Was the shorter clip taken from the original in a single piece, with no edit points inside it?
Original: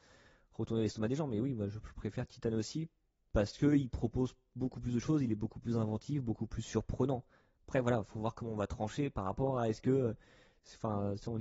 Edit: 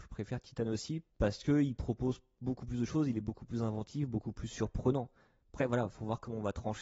no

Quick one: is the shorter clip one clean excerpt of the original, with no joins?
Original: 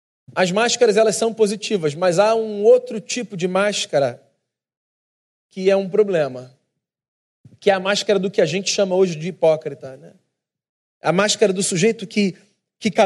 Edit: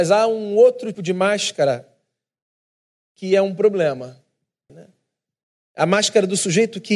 no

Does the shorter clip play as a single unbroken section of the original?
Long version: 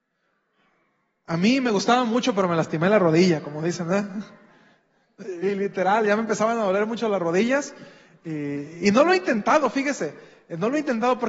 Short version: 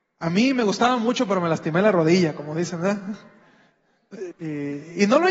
no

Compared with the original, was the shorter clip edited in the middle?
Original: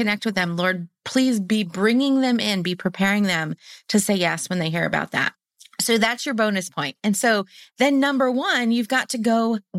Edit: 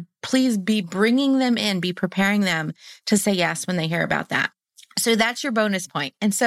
no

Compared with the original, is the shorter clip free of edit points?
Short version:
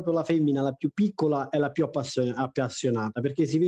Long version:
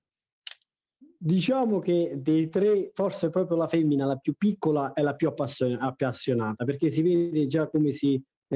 yes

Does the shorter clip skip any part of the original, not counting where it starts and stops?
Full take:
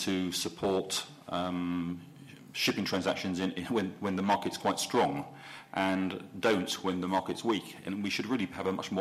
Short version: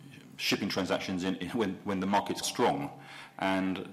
yes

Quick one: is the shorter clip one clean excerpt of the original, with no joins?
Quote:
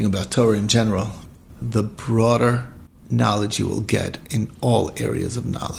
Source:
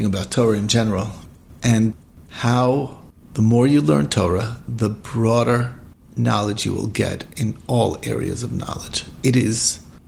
no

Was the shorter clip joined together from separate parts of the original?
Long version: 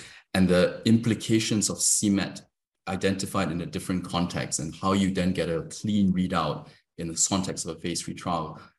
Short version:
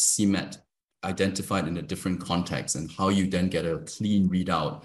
no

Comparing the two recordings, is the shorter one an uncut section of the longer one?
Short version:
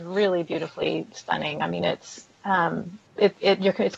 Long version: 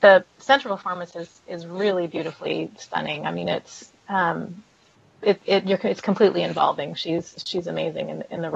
no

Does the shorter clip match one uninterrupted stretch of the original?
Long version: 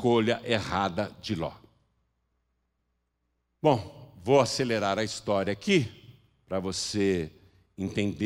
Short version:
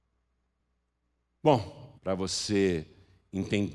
no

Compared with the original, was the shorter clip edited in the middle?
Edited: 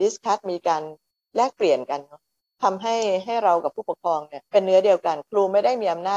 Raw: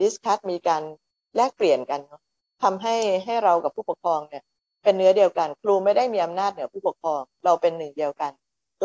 yes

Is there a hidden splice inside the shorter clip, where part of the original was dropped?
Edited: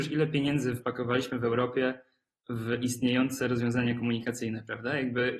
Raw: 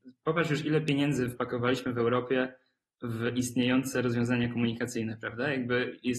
no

